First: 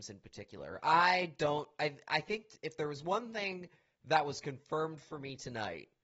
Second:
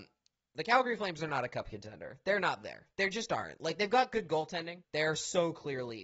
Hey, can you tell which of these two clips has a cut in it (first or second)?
second